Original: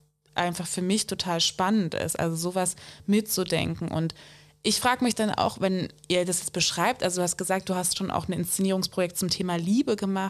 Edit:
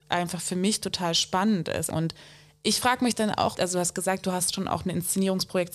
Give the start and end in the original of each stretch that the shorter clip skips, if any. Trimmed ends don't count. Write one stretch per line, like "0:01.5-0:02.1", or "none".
0:02.2-0:03.9
0:05.5-0:07.0